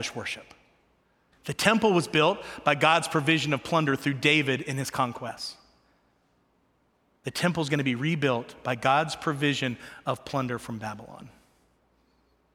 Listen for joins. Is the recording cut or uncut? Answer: cut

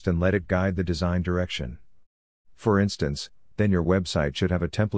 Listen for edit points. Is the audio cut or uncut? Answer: cut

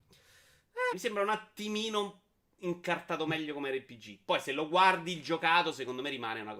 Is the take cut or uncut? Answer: cut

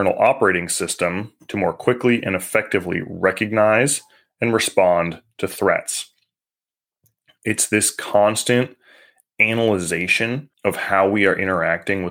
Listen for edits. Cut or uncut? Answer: cut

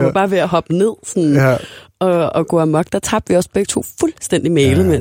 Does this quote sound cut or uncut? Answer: uncut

